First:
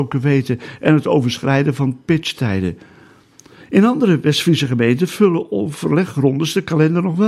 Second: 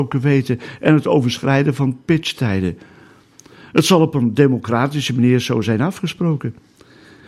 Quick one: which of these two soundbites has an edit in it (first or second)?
first